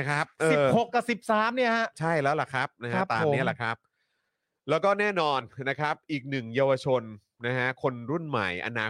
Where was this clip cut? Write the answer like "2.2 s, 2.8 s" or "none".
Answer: none